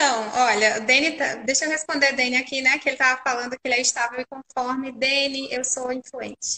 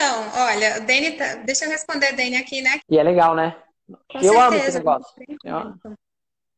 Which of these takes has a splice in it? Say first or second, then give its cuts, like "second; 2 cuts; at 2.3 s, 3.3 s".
second; 2 cuts; at 2.8 s, 4.0 s